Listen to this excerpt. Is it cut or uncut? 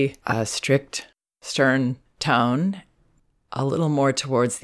uncut